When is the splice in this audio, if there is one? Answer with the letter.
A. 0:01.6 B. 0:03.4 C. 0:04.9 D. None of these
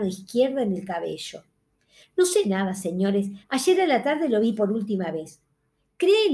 D